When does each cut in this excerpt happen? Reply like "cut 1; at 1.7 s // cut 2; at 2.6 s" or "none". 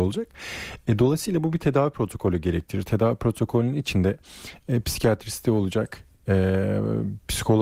none